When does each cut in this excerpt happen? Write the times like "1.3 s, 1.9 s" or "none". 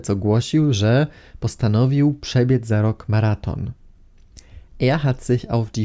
4.7 s